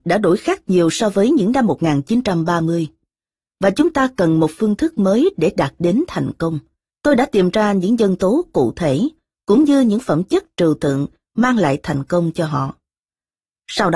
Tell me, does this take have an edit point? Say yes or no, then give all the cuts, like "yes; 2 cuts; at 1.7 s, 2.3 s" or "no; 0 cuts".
yes; 1 cut; at 6.9 s